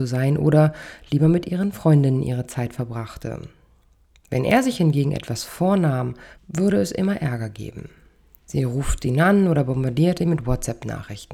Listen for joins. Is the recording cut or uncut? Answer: cut